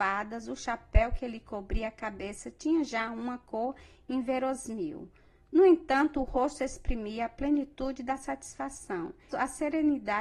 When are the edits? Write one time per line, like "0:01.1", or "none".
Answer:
0:09.3